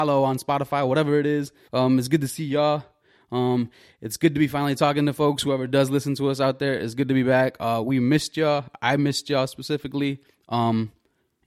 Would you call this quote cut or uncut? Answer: cut